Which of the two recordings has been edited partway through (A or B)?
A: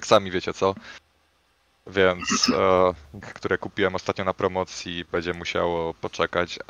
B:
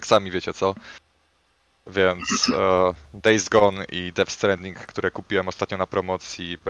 A